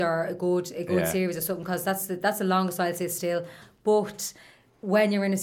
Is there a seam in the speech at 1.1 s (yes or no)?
no